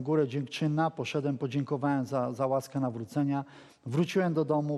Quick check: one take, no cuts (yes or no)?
yes